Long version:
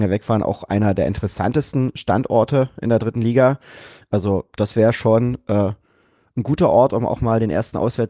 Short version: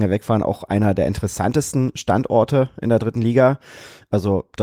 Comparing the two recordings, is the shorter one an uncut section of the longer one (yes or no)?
yes